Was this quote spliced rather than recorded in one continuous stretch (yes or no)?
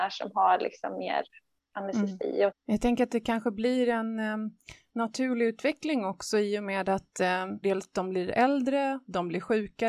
yes